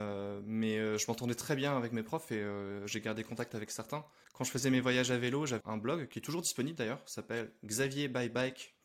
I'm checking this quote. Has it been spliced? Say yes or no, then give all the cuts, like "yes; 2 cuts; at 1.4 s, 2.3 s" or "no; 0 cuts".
yes; 2 cuts; at 4.2 s, 5.6 s